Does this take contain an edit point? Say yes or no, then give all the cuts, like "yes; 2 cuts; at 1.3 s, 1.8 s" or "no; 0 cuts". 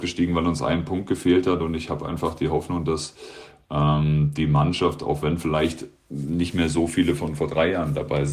no; 0 cuts